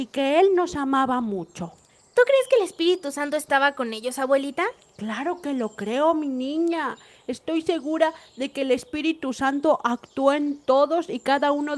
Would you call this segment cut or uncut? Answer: uncut